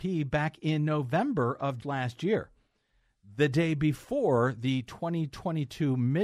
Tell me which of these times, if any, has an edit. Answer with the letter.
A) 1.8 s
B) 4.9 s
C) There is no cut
A